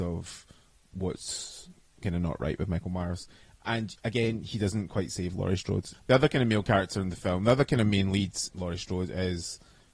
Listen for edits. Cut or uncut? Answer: cut